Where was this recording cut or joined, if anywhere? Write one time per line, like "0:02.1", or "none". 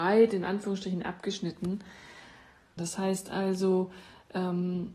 0:02.8